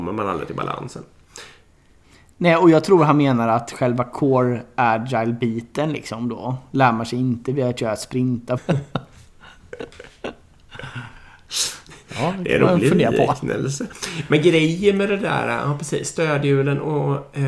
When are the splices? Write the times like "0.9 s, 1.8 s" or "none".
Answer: 8.6 s